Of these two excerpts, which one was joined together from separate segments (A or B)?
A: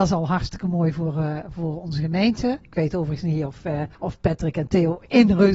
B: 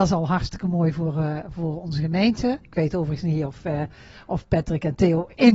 A